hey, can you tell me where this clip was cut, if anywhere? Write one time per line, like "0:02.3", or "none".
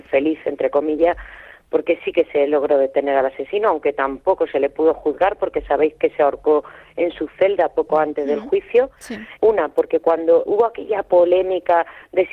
0:09.4
0:10.5